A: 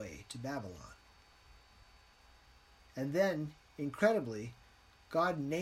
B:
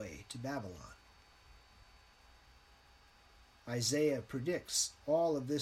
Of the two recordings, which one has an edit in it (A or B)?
A